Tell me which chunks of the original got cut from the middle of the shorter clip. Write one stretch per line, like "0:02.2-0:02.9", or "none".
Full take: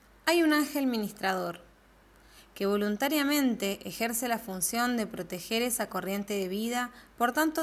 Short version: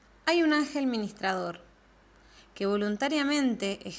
none

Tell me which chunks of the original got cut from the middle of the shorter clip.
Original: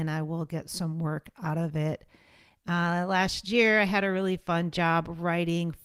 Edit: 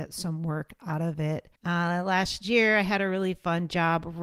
0:02.1-0:02.6

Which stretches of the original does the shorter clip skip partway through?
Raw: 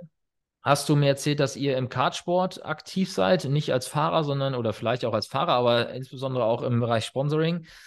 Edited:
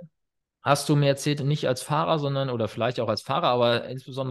0:01.4-0:03.4

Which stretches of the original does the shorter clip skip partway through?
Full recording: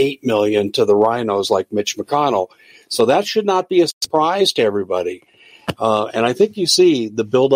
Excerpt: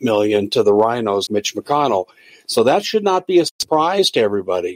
0:01.5-0:01.7

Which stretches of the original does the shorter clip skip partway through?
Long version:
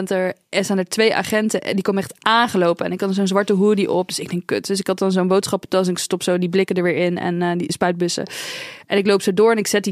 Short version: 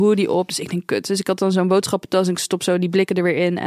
none

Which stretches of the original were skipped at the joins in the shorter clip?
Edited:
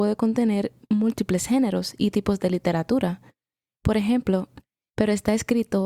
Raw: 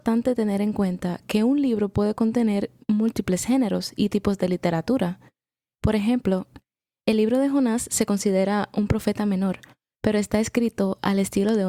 0:06.9-0:09.9

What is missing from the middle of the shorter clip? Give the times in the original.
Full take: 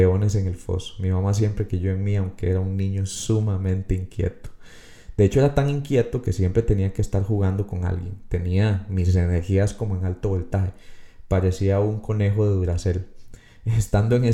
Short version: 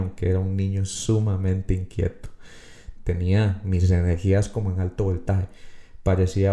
0:05.2-0:08.2

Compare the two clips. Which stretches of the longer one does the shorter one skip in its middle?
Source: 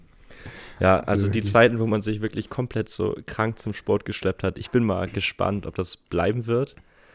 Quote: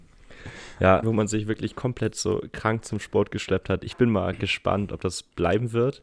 0:01.0-0:01.8

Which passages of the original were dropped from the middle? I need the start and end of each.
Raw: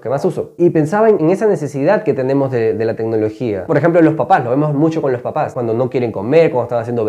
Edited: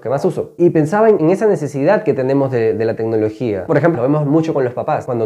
0:03.9-0:04.4

